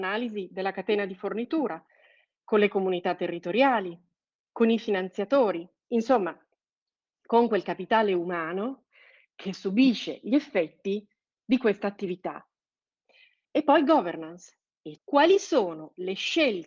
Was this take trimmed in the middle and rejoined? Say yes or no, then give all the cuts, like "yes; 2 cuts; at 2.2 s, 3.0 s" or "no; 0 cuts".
yes; 2 cuts; at 13.4 s, 15.0 s